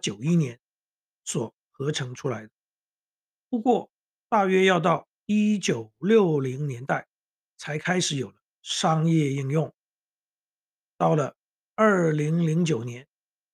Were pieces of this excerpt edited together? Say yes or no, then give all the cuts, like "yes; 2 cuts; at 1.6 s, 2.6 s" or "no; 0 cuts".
no; 0 cuts